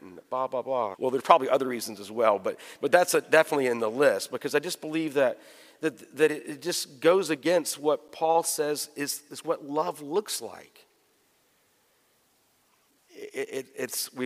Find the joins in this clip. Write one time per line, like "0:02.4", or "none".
0:00.9